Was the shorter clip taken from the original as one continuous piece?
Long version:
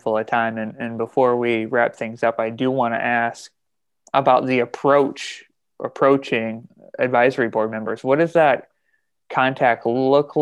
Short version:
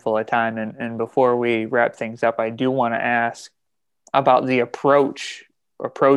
yes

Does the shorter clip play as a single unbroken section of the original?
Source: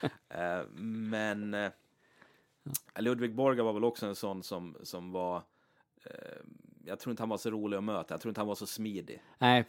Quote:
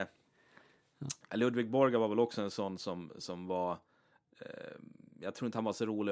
yes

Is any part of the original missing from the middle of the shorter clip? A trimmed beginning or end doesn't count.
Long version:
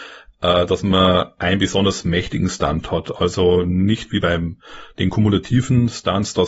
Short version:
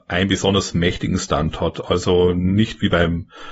no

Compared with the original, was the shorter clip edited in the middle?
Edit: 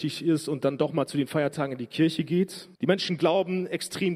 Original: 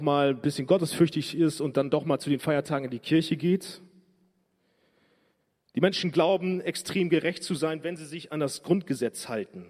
yes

